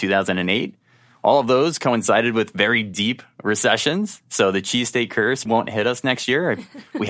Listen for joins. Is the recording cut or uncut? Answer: cut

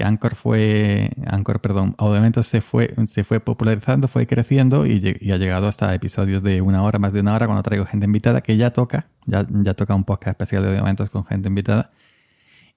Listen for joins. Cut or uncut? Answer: uncut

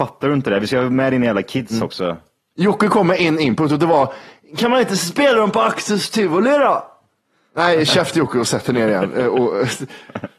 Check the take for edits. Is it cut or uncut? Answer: uncut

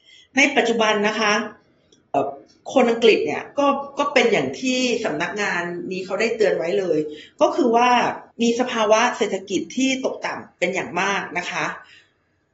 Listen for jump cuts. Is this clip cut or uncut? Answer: cut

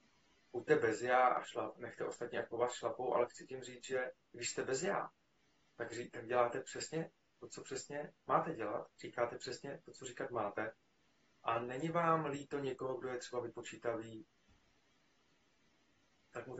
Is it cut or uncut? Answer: uncut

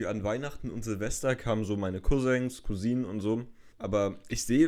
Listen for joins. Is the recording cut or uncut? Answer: cut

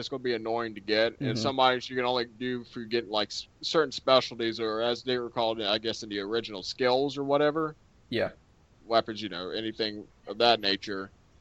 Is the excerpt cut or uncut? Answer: cut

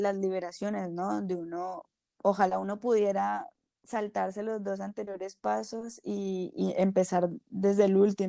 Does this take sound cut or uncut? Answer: uncut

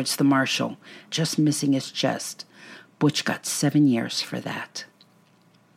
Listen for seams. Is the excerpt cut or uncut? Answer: cut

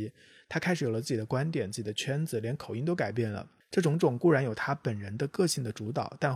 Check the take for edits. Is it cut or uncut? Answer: uncut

